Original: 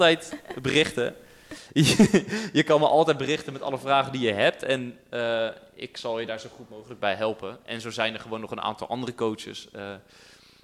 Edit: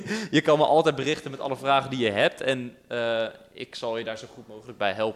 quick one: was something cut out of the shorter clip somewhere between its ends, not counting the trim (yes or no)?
no